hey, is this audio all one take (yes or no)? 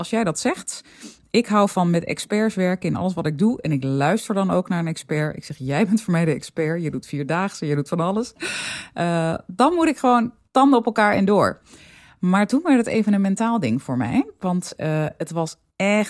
yes